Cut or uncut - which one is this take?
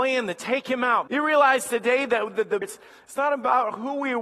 cut